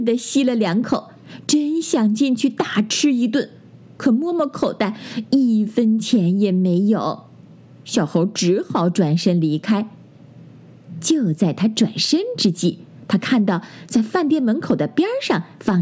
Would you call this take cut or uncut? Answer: uncut